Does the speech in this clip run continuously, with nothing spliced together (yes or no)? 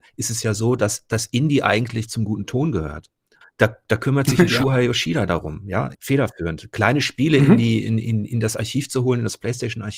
no